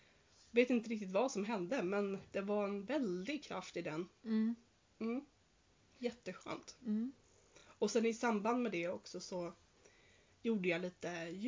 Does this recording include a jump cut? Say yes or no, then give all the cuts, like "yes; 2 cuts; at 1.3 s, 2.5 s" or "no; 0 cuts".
no; 0 cuts